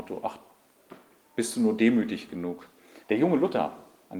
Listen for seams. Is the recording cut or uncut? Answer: cut